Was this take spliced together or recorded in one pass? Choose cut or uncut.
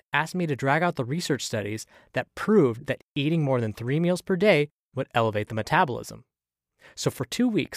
uncut